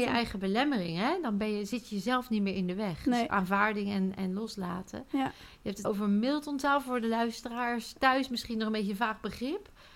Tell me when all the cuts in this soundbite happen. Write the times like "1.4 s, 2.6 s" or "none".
5.8 s